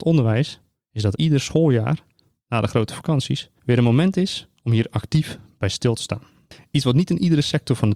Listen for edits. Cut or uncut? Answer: cut